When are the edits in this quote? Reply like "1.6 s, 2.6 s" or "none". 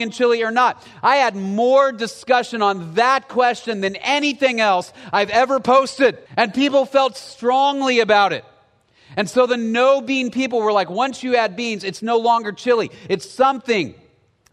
6.3 s